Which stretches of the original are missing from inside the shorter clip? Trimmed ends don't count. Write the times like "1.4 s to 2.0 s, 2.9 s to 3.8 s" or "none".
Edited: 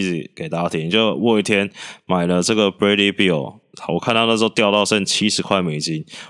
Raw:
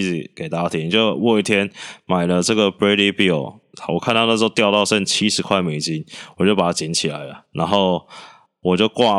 none